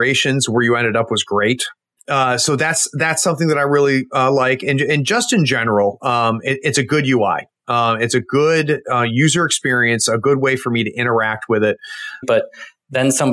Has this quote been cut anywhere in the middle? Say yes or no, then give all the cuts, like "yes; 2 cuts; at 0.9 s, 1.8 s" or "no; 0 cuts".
yes; 1 cut; at 12.2 s